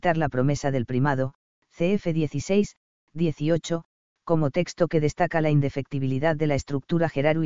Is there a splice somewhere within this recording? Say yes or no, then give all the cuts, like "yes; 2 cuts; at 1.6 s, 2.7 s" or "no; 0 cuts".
no; 0 cuts